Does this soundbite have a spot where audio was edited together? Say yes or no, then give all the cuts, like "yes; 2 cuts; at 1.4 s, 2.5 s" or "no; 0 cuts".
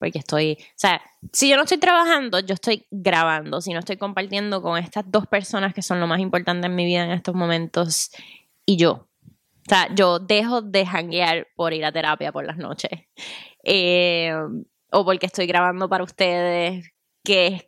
no; 0 cuts